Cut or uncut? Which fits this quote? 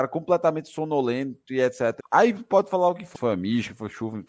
cut